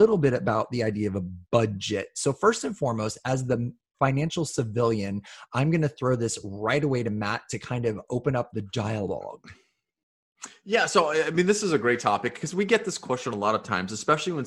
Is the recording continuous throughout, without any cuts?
yes; 0 cuts

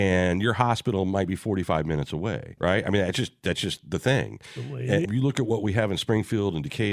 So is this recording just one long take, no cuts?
no; 2 cuts; at 2.6 s, 5.0 s

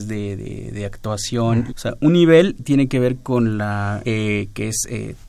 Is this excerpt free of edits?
no; 2 cuts; at 1.7 s, 4.0 s

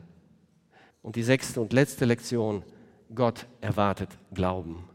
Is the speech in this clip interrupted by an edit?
yes; 1 cut; at 0.9 s

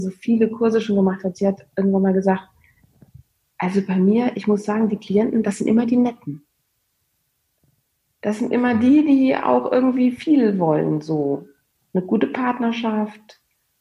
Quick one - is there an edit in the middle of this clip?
no; 0 cuts

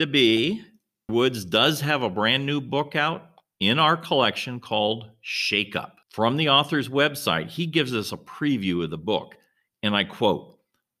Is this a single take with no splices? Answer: no; 2 cuts; at 1.1 s, 6.0 s

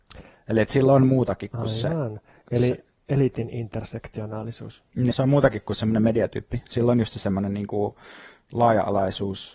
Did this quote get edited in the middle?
yes; 1 cut; at 5.1 s

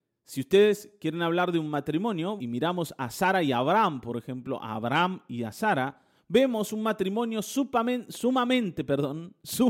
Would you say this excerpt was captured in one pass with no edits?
no; 1 cut; at 2.4 s

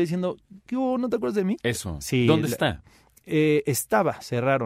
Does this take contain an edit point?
yes; 1 cut; at 1.6 s

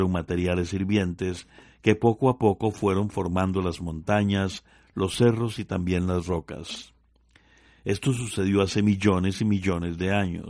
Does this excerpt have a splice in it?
no; 0 cuts

